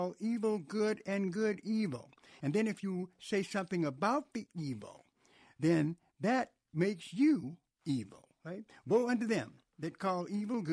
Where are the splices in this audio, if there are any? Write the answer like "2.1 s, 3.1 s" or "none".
2.4 s